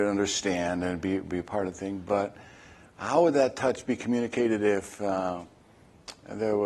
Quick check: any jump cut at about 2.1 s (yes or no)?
no